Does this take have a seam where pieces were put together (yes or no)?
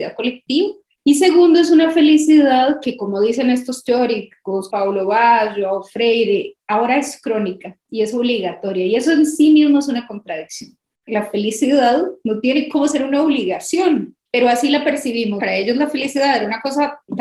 yes